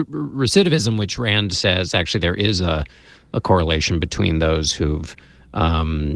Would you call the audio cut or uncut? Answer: uncut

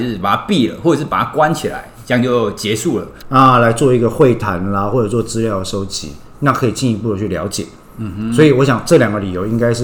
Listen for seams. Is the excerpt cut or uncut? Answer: cut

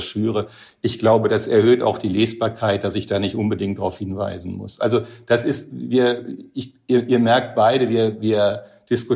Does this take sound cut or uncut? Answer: uncut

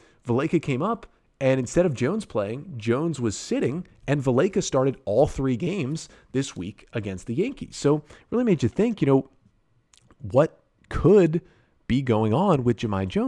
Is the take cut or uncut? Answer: uncut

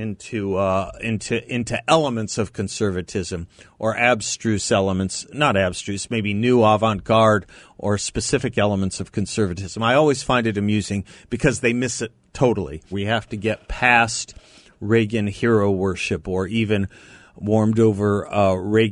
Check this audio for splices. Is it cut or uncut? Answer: cut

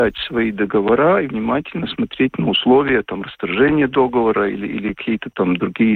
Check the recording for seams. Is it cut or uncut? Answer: uncut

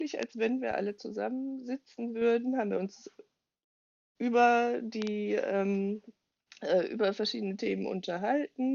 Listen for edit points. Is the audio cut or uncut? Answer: uncut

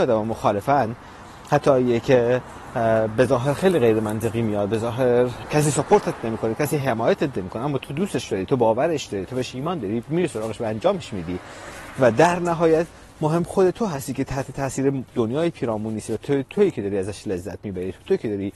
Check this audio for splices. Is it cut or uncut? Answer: cut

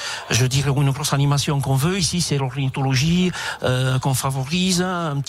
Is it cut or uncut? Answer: uncut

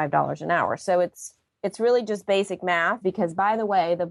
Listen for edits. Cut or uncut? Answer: cut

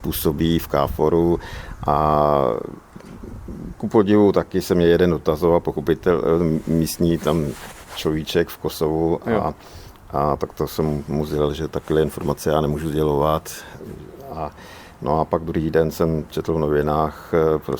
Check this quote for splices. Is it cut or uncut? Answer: uncut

